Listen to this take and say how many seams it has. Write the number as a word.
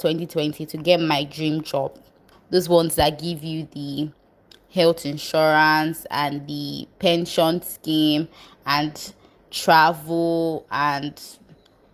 one